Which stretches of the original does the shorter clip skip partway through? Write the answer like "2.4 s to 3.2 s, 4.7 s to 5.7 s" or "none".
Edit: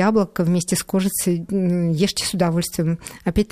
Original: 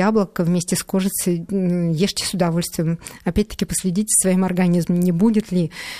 none